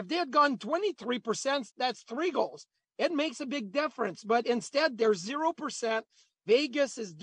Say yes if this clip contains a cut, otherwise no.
yes